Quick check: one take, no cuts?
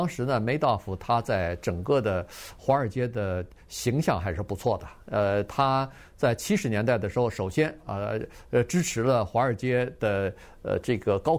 yes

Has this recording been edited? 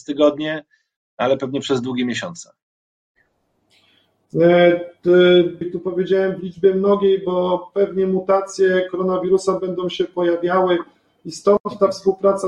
yes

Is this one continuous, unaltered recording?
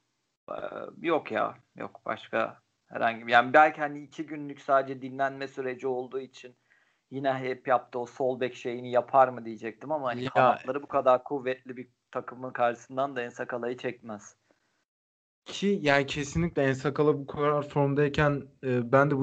yes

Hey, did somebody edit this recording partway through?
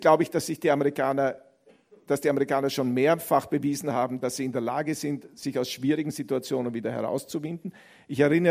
no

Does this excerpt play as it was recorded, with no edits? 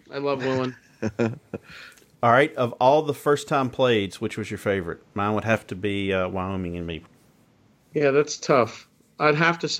yes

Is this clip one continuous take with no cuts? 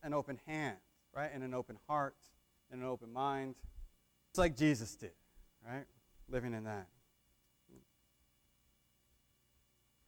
no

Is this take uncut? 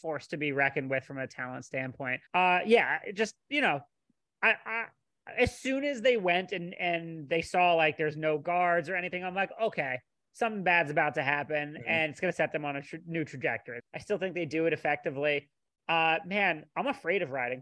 no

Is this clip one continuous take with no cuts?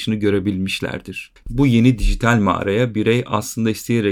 no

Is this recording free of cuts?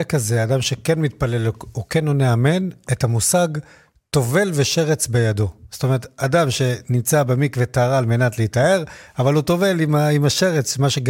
yes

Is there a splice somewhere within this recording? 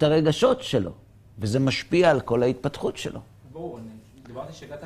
yes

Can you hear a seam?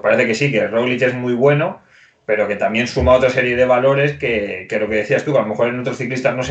no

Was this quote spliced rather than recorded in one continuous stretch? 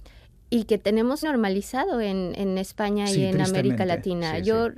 yes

